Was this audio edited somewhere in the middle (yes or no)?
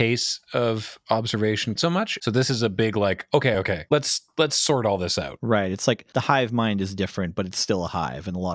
yes